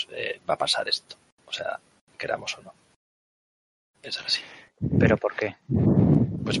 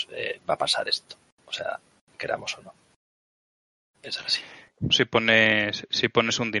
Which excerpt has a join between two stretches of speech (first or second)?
second